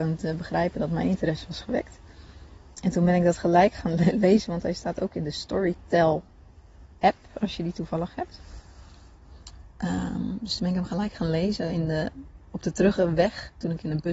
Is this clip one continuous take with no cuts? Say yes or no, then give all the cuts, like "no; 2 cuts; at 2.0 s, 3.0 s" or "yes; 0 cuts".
yes; 0 cuts